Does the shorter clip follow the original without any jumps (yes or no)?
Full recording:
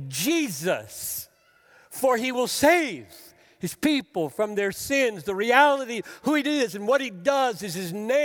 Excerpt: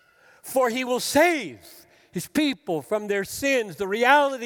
yes